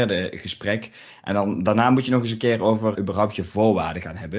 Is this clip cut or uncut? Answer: cut